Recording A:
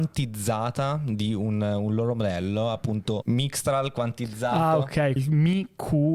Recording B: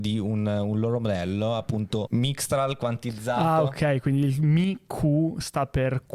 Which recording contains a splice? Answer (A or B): A